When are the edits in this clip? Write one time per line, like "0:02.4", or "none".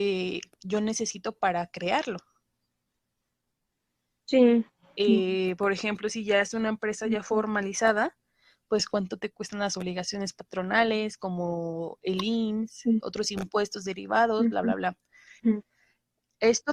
0:05.0
0:13.0
0:15.4